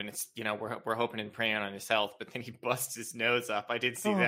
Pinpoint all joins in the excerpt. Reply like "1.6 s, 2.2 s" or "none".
none